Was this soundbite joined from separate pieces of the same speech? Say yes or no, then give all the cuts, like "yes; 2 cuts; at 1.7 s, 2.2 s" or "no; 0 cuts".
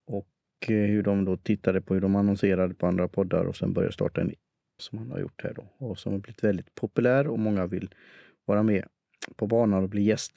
yes; 1 cut; at 4.8 s